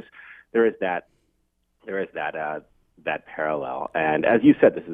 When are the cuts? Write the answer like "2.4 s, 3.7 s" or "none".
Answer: none